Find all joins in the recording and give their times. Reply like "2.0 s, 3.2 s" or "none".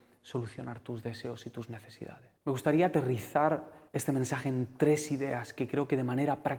2.4 s, 3.9 s